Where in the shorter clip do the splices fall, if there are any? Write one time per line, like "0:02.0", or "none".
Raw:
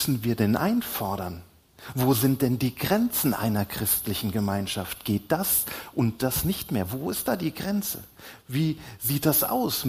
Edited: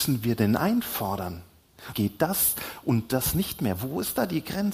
0:01.9